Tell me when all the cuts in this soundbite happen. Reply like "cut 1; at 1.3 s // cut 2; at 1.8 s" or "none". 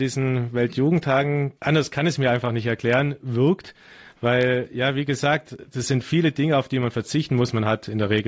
cut 1; at 1.6 s